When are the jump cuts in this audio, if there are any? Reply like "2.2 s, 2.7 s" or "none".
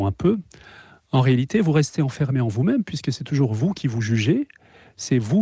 none